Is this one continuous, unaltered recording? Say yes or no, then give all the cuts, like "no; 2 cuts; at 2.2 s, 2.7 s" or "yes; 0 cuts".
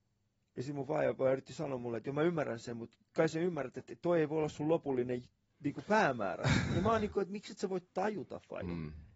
yes; 0 cuts